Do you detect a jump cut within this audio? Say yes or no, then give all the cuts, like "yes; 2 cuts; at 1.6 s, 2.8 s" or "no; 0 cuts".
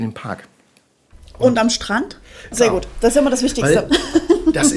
yes; 1 cut; at 2.5 s